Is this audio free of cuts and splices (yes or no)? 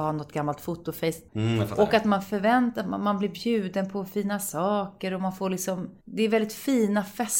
no